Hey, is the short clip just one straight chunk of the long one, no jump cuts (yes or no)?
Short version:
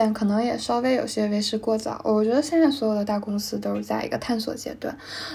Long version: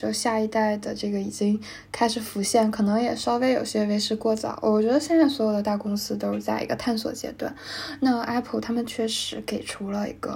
yes